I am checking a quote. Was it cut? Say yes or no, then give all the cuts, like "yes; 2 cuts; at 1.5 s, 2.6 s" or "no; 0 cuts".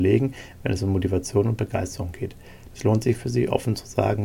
yes; 1 cut; at 2.7 s